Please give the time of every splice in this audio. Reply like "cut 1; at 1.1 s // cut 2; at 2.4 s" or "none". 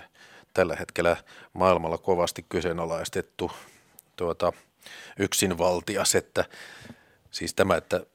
none